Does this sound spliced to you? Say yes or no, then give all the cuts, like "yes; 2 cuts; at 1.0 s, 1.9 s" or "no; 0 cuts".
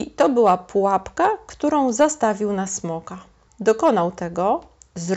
yes; 1 cut; at 3.5 s